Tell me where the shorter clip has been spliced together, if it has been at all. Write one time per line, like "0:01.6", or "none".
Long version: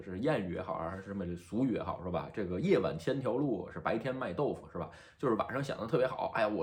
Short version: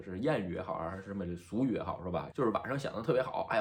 0:02.3